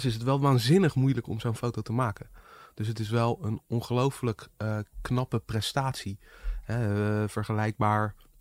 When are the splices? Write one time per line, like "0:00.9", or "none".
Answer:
none